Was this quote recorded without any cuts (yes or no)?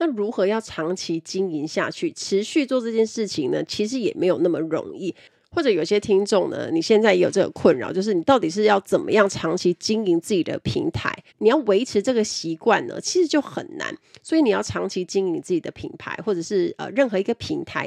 no